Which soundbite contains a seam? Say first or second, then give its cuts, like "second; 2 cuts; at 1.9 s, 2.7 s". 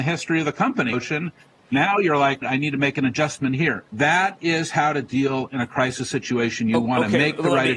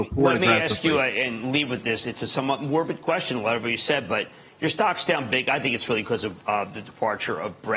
first; 3 cuts; at 0.9 s, 2.4 s, 3.9 s